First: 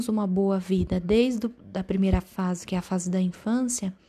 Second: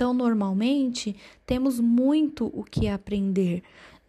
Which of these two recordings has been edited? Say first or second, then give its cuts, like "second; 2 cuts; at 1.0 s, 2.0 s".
first; 1 cut; at 1.6 s